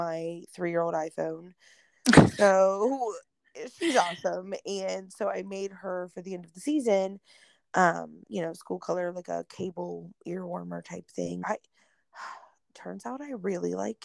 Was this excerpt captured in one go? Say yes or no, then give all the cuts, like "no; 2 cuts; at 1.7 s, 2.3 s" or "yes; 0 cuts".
no; 2 cuts; at 8.2 s, 11.4 s